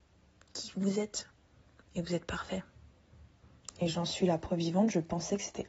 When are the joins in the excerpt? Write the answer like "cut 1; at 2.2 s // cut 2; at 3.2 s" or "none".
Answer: cut 1; at 3.7 s